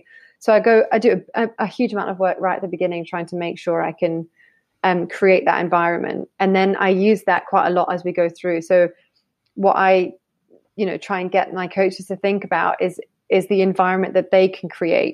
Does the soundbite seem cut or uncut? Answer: uncut